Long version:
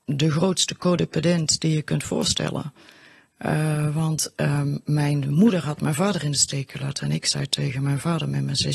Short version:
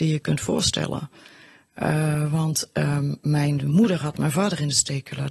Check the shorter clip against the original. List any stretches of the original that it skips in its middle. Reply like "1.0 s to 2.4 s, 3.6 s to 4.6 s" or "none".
none